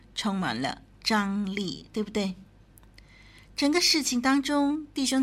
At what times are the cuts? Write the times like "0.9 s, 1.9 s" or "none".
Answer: none